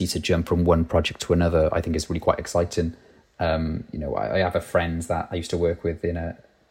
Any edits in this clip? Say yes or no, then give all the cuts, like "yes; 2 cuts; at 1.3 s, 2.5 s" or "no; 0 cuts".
yes; 1 cut; at 3.2 s